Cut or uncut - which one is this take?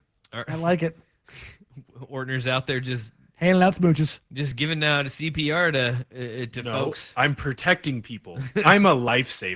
uncut